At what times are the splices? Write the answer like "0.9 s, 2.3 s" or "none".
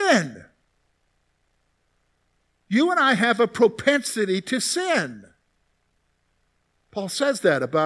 6.7 s